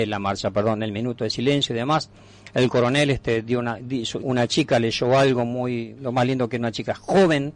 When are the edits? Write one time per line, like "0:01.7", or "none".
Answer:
0:04.2
0:05.9